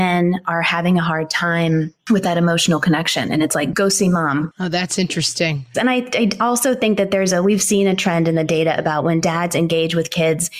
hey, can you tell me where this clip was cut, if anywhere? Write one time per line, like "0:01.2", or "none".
0:05.7